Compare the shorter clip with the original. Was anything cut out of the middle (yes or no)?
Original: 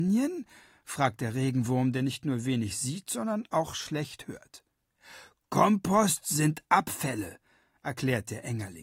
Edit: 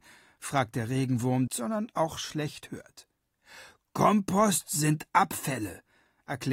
yes